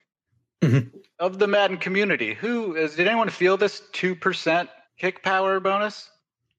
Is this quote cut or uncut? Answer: cut